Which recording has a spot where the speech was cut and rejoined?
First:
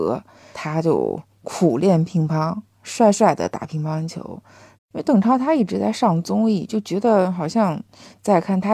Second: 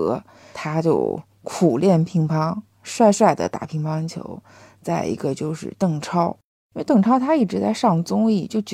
first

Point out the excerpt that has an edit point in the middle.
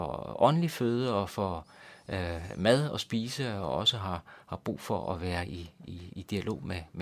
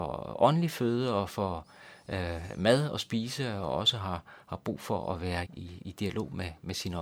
second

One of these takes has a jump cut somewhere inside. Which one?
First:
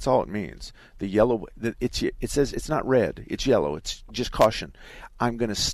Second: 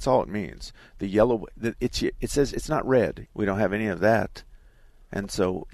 second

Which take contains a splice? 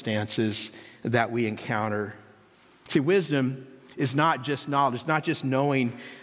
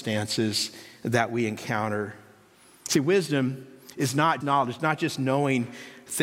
second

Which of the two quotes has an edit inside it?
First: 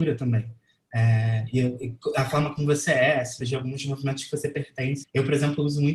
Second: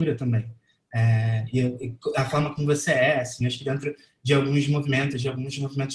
first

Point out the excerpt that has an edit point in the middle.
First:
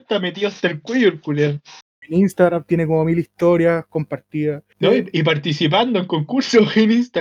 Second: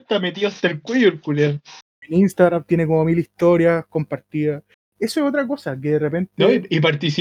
first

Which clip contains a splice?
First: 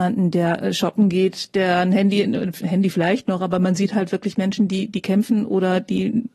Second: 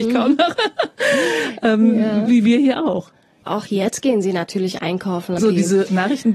second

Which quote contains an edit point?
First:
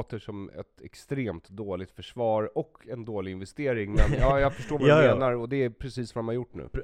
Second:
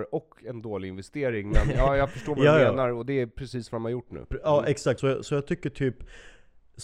second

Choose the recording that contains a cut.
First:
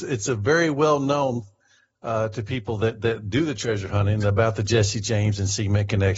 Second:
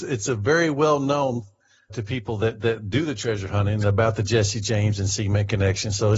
second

